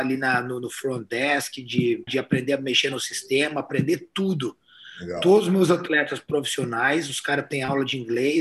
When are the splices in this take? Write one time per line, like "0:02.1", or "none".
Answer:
0:02.1